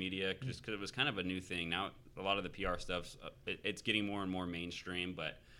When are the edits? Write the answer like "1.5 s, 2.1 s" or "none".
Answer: none